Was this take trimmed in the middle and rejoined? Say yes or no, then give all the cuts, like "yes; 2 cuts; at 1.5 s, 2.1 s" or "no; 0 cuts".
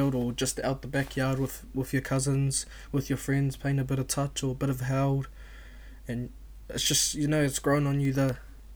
no; 0 cuts